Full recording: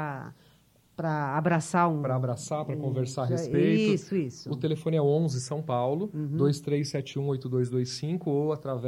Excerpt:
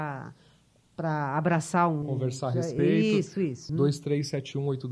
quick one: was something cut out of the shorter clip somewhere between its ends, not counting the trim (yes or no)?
yes